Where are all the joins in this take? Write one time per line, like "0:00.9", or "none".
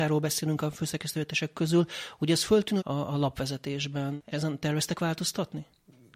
0:02.8
0:04.3

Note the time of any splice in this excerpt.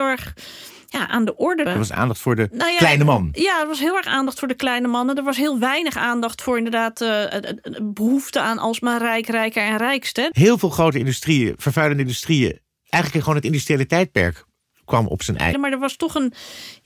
0:01.7
0:10.3
0:15.5

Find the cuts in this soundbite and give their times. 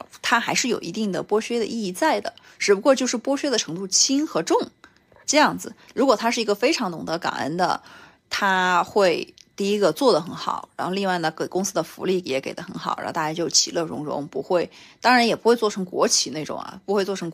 0:05.9

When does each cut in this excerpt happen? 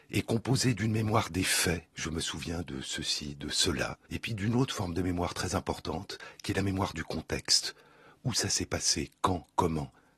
0:01.9
0:04.1

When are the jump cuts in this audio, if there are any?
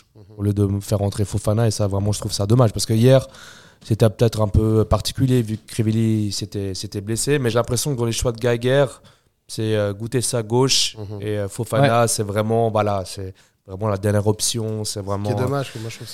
none

